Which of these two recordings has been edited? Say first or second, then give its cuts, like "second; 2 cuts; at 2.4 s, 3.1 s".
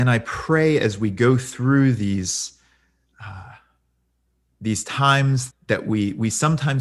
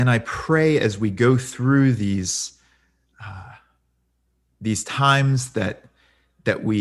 first; 1 cut; at 5.5 s